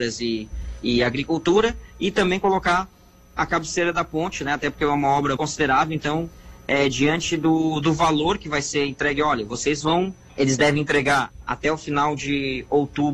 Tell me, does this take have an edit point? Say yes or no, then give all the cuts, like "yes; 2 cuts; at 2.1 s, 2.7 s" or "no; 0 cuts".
yes; 2 cuts; at 5.4 s, 10.3 s